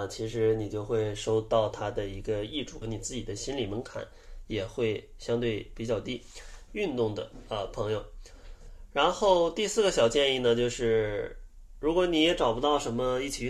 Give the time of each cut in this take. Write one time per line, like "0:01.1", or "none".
0:02.8
0:06.7